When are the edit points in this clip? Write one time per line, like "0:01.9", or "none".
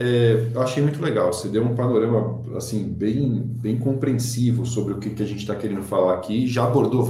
none